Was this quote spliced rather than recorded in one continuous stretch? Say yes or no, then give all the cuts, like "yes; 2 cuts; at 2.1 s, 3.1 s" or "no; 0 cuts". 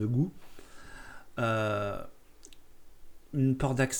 no; 0 cuts